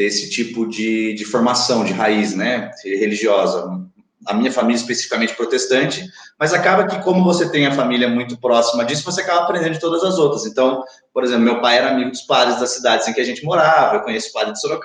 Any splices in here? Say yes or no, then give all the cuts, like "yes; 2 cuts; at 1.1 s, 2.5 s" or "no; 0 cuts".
no; 0 cuts